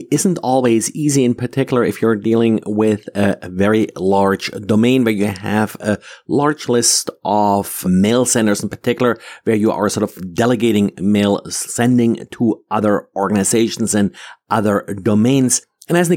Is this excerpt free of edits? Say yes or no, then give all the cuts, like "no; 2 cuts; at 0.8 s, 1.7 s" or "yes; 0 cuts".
no; 1 cut; at 7.8 s